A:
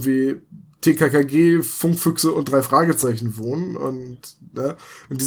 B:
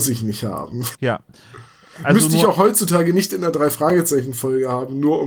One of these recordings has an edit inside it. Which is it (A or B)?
B